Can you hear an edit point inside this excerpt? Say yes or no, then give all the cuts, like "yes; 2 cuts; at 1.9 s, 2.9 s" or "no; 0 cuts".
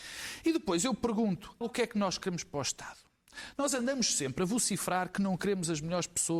yes; 1 cut; at 1.6 s